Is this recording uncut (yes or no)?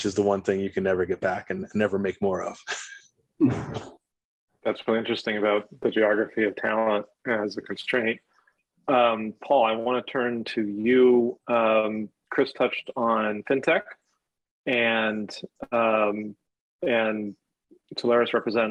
yes